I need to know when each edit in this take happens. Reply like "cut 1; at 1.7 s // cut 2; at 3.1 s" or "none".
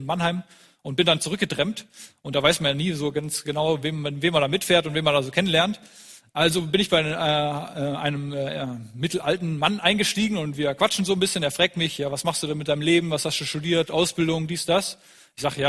none